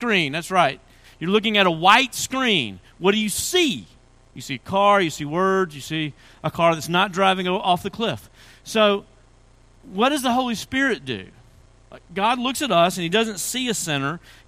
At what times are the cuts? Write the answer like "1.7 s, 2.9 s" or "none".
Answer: none